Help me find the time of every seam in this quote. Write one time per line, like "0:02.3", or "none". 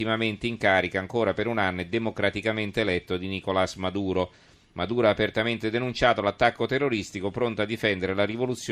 none